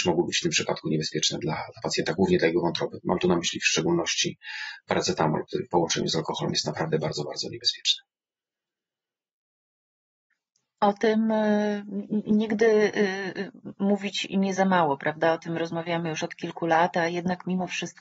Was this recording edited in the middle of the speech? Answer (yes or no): yes